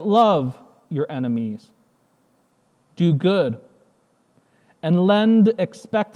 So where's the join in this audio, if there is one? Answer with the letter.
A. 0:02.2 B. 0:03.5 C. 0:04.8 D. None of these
D